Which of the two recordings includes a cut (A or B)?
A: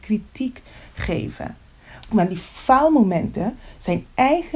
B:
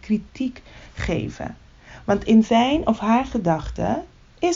A